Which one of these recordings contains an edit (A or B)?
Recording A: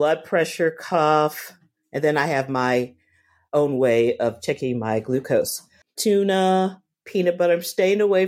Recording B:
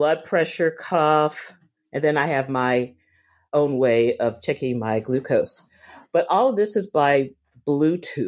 A